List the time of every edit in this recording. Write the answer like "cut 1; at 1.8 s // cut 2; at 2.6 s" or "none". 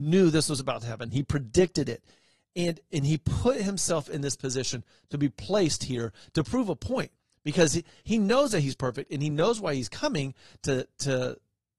none

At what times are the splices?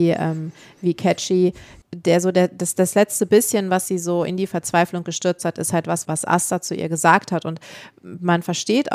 cut 1; at 6.0 s

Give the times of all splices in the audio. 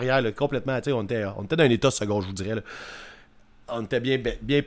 none

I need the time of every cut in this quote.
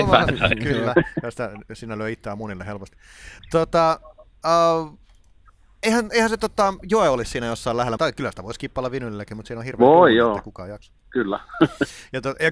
cut 1; at 8.0 s

